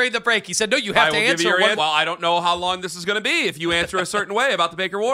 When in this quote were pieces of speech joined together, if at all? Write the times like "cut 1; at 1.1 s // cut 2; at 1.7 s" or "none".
cut 1; at 1.8 s